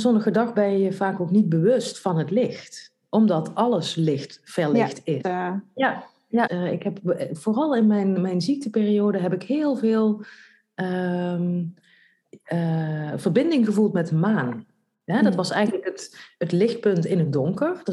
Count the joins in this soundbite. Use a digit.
2